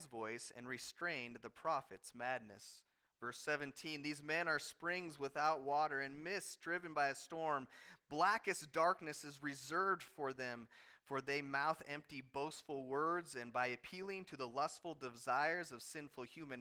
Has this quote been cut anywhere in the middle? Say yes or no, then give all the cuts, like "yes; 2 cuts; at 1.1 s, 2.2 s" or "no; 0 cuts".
no; 0 cuts